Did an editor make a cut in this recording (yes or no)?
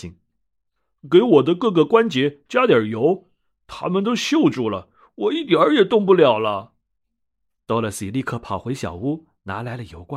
no